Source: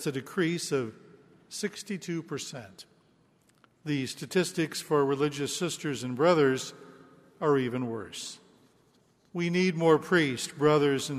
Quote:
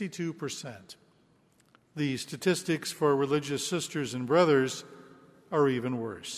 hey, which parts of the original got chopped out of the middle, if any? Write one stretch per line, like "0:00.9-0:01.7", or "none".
none